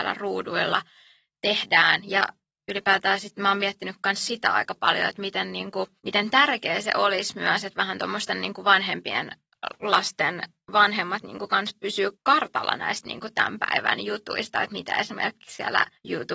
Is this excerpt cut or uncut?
uncut